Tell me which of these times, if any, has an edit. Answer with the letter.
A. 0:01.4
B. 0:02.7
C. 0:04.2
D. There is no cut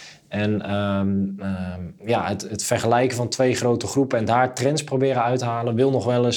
D